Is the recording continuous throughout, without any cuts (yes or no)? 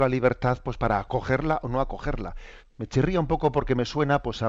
no